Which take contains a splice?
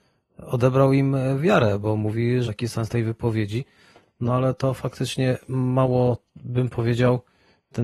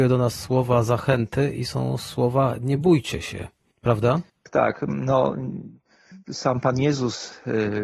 first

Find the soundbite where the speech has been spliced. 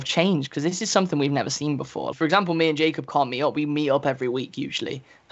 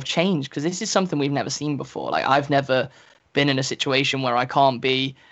first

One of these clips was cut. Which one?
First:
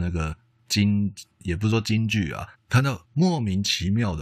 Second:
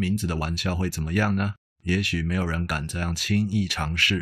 first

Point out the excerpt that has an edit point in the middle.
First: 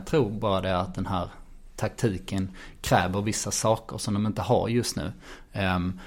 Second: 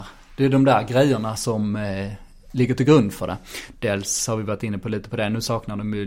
second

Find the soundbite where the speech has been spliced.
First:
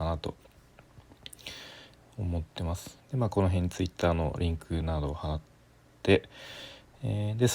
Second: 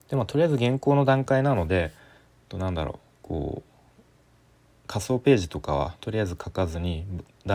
first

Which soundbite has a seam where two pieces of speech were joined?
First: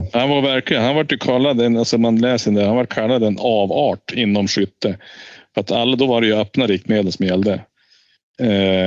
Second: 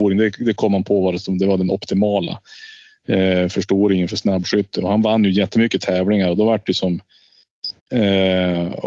second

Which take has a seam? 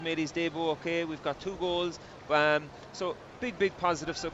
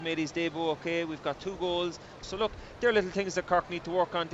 second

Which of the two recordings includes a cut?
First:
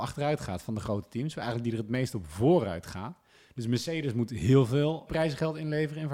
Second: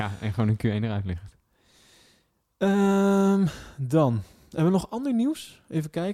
first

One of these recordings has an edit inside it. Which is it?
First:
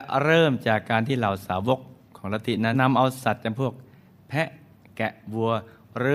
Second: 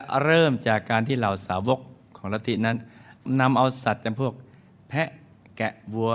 first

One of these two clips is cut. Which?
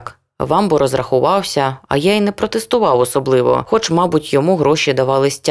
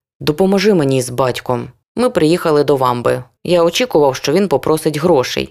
second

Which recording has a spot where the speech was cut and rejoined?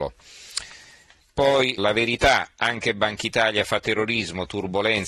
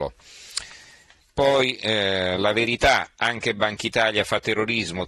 first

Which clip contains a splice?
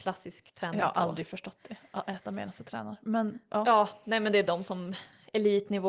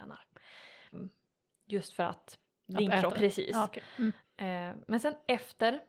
second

